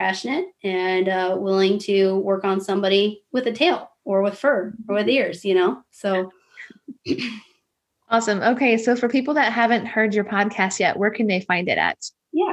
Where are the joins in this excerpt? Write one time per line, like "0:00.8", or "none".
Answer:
none